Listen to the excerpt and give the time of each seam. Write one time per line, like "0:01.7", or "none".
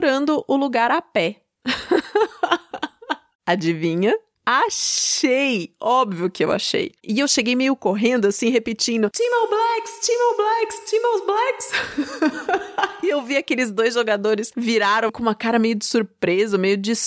0:15.1